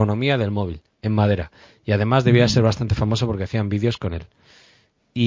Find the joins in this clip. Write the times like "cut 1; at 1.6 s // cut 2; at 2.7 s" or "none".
none